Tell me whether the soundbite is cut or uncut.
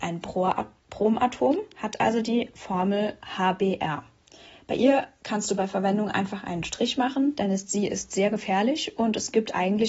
uncut